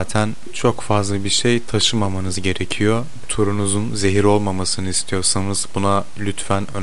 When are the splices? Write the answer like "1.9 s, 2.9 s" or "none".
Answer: 3.2 s